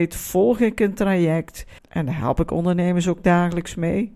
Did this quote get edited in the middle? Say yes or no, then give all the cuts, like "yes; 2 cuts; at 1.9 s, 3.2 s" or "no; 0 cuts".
yes; 1 cut; at 1.8 s